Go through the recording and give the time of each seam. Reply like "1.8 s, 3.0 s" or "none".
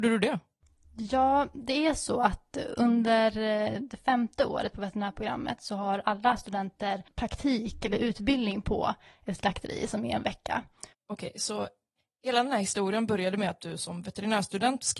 10.9 s